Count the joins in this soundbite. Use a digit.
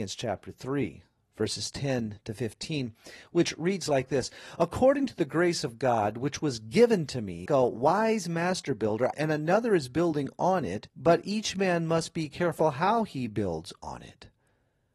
3